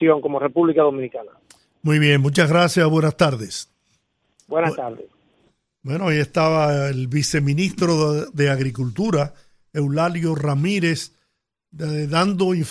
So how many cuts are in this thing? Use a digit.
0